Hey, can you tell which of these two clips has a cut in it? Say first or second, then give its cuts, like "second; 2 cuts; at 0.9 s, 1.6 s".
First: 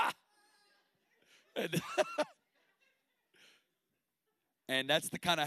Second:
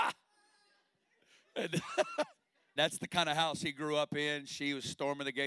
second; 1 cut; at 2.8 s